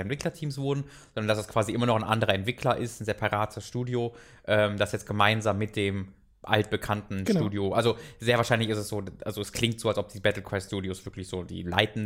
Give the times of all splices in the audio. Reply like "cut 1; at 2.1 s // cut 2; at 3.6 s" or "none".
none